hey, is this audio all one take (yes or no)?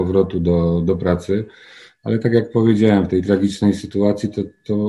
yes